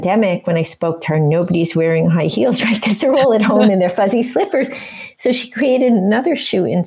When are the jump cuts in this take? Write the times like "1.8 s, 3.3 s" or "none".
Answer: none